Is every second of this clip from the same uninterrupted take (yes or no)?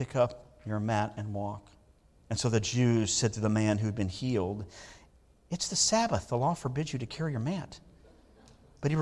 no